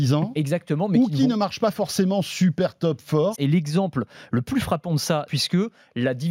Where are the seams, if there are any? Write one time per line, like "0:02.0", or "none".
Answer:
0:03.3
0:05.3